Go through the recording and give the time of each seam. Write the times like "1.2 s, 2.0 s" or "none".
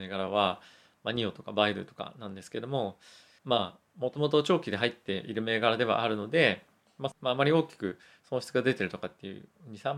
3.4 s, 7.1 s